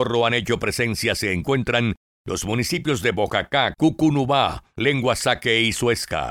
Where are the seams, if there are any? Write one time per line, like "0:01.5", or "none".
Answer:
0:03.7